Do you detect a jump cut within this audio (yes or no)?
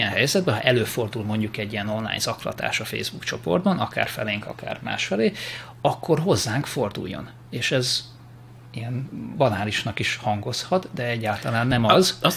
no